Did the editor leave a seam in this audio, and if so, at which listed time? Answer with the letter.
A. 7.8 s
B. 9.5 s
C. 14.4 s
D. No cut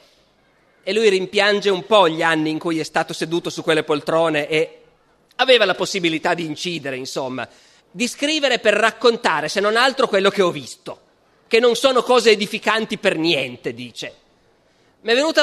A